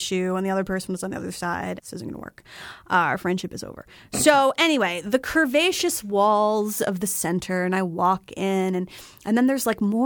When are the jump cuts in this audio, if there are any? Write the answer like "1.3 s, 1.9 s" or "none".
1.8 s